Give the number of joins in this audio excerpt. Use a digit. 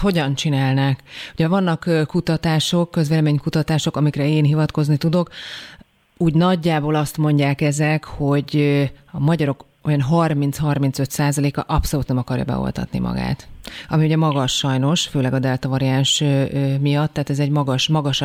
0